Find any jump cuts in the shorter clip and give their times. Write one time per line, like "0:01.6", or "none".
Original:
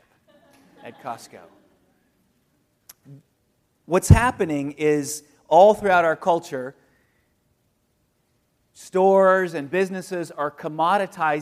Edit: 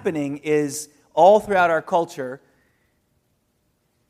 none